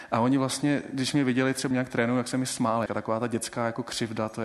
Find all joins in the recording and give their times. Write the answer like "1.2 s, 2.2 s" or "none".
1.7 s, 2.9 s